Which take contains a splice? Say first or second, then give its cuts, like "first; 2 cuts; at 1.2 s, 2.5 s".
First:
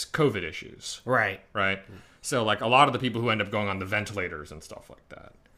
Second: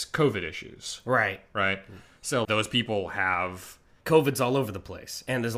second; 2 cuts; at 2.4 s, 4.0 s